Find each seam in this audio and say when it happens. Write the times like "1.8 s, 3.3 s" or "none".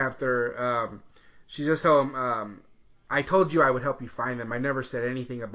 none